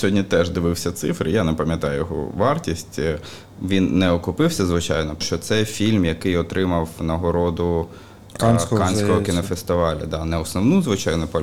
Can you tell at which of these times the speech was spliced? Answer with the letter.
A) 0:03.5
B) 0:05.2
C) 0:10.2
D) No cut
B